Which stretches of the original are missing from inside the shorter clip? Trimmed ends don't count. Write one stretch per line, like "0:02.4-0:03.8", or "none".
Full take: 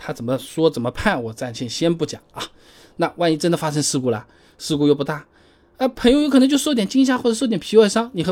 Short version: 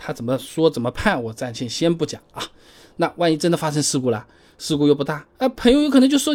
0:05.3-0:05.7